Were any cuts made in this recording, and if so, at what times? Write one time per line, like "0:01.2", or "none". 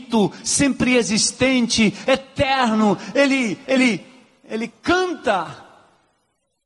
none